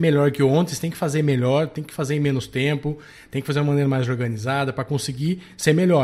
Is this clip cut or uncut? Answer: uncut